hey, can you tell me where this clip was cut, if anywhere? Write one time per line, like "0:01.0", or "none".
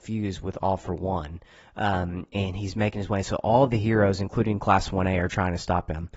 none